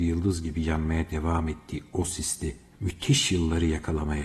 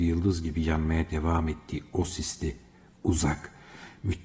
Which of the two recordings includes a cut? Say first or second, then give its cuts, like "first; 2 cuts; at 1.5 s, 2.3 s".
first; 1 cut; at 2.7 s